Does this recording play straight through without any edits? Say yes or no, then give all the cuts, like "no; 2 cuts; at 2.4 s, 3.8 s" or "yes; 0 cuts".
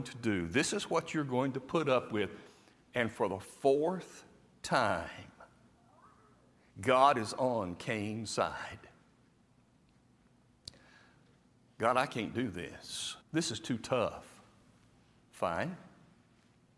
no; 1 cut; at 13.2 s